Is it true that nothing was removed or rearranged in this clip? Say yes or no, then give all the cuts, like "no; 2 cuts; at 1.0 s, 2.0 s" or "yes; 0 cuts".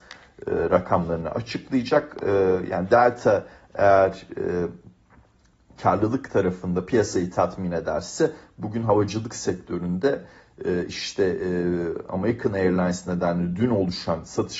yes; 0 cuts